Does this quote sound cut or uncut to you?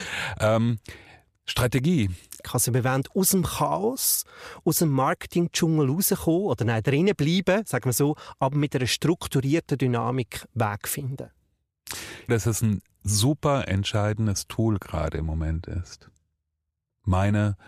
cut